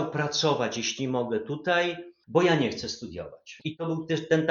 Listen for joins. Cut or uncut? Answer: cut